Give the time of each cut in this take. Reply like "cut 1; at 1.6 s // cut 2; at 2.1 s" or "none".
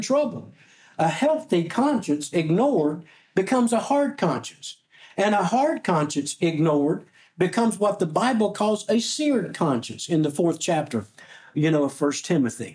none